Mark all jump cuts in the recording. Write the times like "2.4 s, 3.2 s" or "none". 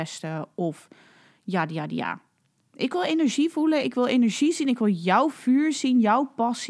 none